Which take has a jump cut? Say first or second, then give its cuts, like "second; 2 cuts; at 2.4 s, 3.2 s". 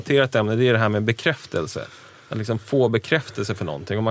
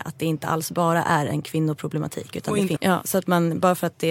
second; 1 cut; at 2.8 s